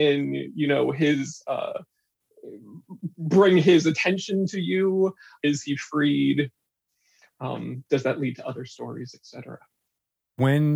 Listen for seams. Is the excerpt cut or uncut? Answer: cut